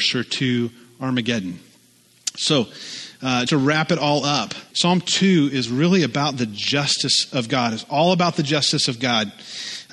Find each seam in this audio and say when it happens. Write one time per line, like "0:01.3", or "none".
0:03.5
0:04.7